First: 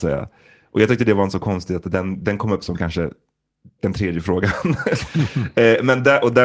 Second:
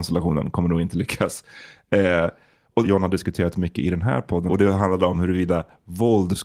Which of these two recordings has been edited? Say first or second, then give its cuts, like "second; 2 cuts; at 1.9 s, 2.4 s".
second; 2 cuts; at 2.8 s, 4.5 s